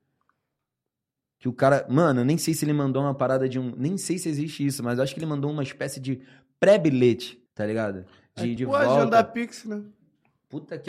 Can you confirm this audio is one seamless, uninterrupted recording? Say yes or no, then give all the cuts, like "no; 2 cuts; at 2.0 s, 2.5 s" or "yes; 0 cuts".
no; 2 cuts; at 7.5 s, 8.6 s